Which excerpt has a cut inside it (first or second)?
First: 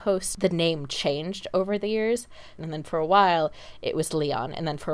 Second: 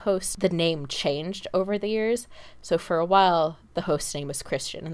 first